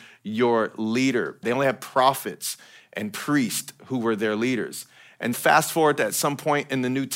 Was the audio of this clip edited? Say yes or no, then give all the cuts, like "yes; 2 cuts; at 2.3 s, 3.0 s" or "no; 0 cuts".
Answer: yes; 2 cuts; at 1.4 s, 5.3 s